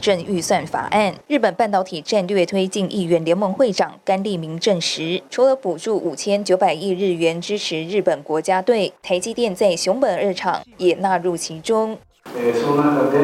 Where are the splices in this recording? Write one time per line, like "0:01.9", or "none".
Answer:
none